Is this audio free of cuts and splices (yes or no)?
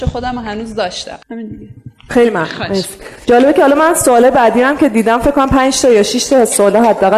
no